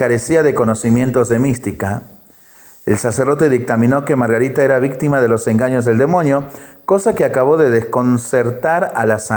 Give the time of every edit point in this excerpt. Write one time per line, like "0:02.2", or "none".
none